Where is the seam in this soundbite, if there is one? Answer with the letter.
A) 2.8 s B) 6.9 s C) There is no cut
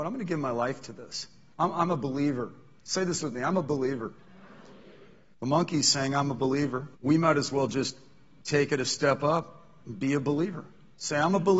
B